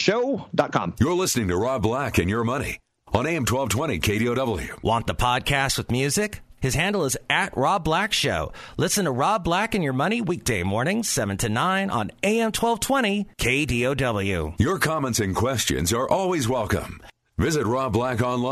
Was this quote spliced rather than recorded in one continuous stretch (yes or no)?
yes